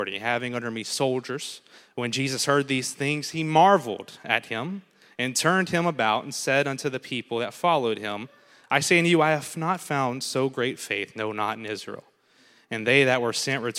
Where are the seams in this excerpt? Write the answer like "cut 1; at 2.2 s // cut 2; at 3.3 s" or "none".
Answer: cut 1; at 1.8 s